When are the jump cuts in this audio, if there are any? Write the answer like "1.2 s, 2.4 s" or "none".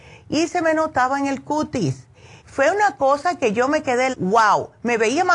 2.4 s, 4.1 s